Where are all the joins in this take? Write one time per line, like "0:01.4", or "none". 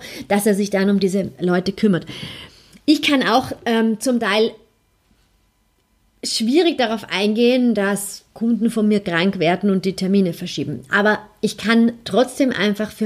none